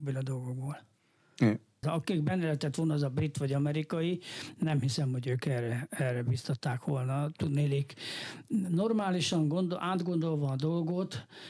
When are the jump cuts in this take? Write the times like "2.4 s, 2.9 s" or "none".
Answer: 1.8 s